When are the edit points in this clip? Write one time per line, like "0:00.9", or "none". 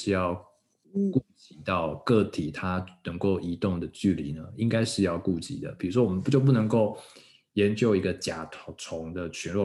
none